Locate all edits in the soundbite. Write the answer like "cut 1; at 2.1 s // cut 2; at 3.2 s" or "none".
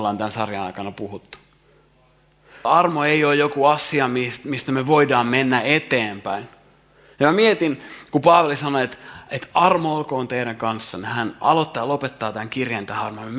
cut 1; at 2.6 s